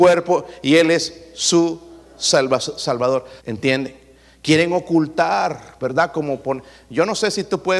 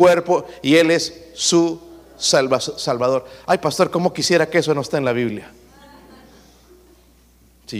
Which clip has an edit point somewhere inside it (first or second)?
first